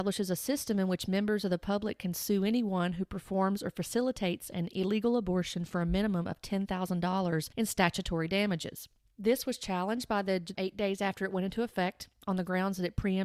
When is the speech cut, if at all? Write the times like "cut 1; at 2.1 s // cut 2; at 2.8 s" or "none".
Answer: cut 1; at 10.6 s